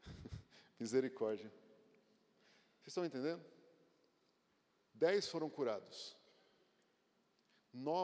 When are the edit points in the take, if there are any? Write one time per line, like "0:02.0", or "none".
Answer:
none